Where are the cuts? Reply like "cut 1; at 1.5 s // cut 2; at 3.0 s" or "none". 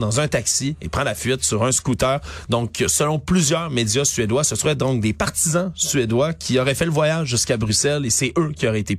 cut 1; at 2.5 s